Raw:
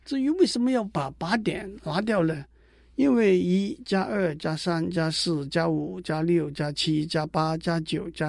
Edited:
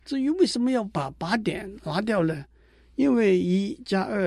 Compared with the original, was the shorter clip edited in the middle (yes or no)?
no